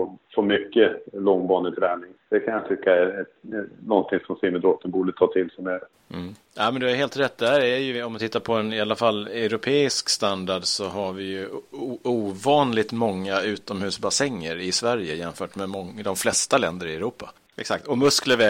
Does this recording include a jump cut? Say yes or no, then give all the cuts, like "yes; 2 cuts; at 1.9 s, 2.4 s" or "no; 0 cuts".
yes; 1 cut; at 17.5 s